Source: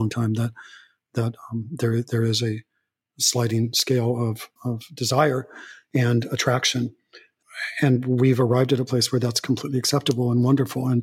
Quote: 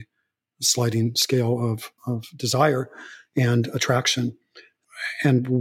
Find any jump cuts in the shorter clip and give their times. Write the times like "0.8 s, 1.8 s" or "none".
none